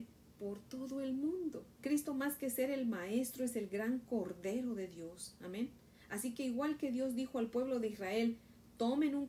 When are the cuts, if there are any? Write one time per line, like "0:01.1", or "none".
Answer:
0:01.8